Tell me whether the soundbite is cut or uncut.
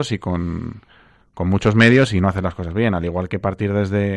uncut